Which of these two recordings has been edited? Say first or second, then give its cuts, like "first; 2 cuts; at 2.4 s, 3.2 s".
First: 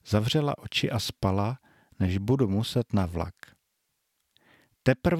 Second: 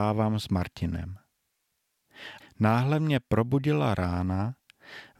second; 1 cut; at 2.4 s